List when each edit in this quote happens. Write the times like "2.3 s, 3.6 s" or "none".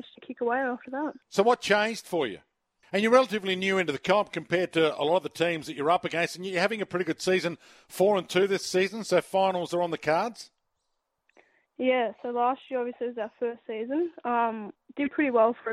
1.2 s, 2.8 s